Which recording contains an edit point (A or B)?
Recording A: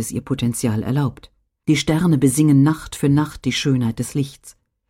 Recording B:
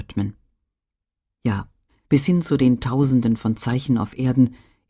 B